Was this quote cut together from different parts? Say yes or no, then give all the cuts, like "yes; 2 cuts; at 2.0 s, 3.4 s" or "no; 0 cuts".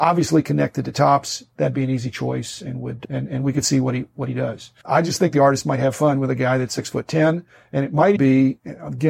yes; 2 cuts; at 4.8 s, 8.2 s